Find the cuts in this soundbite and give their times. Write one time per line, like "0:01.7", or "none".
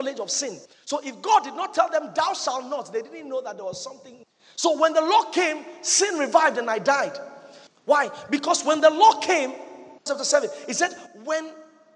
0:07.7
0:10.1